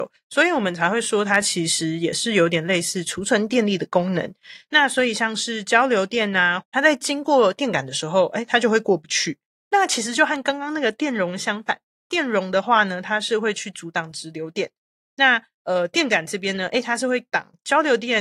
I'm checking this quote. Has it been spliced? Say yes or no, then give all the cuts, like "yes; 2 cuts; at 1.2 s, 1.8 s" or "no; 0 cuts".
yes; 2 cuts; at 4.7 s, 6.6 s